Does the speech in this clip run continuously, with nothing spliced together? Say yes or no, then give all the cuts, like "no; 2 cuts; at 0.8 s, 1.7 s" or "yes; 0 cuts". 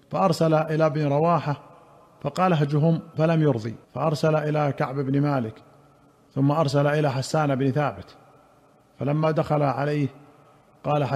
no; 1 cut; at 3.8 s